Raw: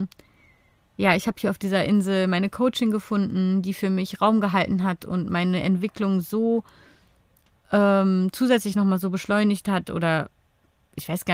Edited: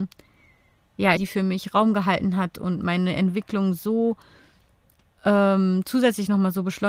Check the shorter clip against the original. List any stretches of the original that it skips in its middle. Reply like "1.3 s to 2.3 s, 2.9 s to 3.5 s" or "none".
1.2 s to 3.6 s